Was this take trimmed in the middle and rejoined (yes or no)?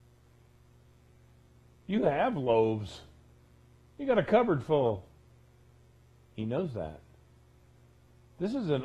no